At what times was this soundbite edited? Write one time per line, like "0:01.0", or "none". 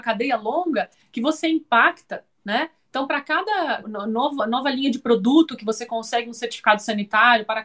0:03.8